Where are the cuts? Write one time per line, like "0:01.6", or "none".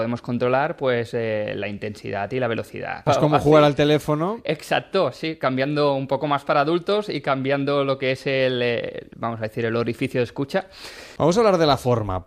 0:03.1
0:11.2